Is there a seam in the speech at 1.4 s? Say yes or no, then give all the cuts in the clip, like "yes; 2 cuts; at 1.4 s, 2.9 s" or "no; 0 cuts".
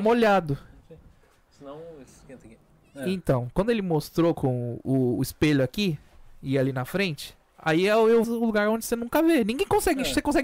no; 1 cut; at 8.2 s